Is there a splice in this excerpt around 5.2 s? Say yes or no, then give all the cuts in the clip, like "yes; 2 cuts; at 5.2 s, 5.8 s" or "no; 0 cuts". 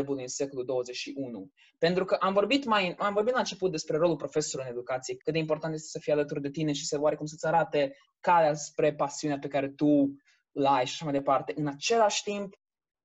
yes; 2 cuts; at 3.0 s, 5.2 s